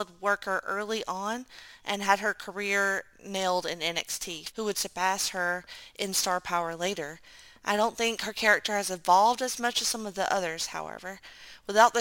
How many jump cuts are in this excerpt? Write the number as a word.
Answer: one